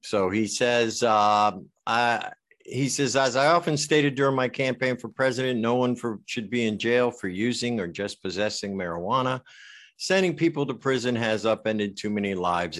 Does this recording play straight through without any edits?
yes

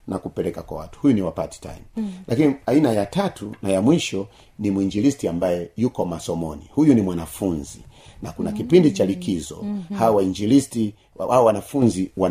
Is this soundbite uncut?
yes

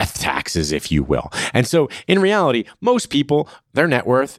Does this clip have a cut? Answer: no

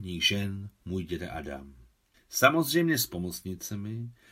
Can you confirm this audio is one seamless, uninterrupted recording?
no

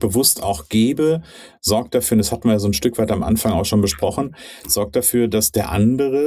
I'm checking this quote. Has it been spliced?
no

